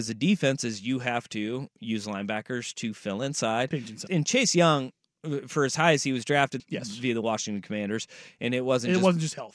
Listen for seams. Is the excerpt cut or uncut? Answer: cut